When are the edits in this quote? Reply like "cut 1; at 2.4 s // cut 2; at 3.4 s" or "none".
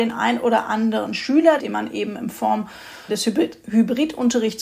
cut 1; at 1.6 s // cut 2; at 3.1 s